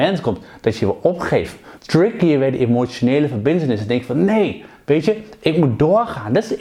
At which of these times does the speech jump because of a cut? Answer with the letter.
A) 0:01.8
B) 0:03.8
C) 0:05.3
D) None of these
A